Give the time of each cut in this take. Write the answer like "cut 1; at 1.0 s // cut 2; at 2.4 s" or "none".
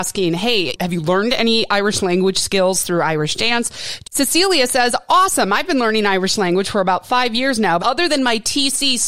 cut 1; at 4.0 s // cut 2; at 7.8 s